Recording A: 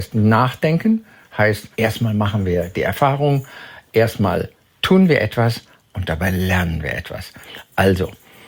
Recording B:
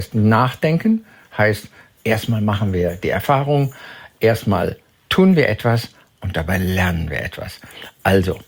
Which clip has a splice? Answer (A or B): A